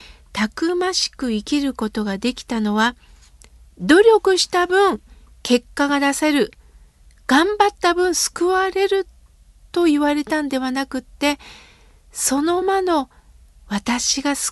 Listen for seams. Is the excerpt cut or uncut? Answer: cut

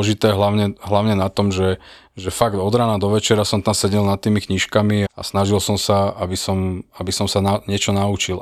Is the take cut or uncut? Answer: cut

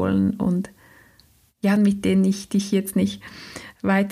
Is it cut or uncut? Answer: cut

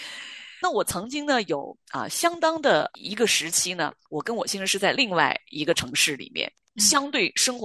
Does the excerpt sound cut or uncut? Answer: uncut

